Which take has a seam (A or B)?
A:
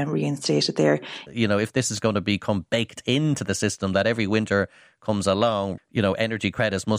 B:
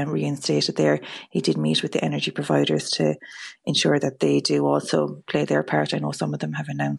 A